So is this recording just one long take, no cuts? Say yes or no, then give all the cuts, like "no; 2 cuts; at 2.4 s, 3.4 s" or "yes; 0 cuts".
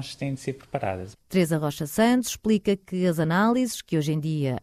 no; 1 cut; at 1.2 s